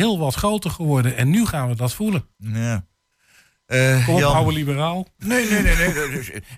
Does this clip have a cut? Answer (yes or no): yes